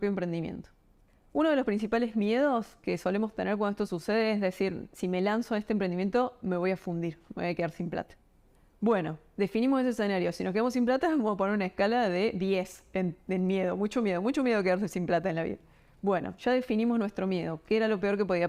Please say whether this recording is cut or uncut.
uncut